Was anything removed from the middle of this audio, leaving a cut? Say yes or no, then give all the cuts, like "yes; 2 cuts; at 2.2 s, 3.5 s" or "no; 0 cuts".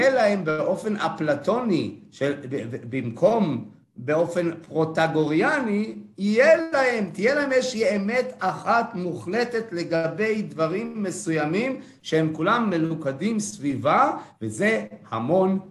no; 0 cuts